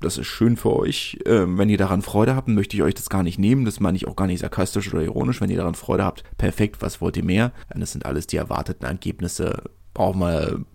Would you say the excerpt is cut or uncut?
cut